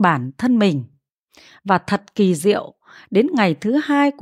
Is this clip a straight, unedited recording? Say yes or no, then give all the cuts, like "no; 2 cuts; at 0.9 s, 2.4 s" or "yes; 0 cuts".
yes; 0 cuts